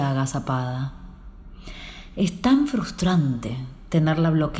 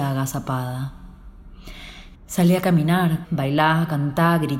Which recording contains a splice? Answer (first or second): second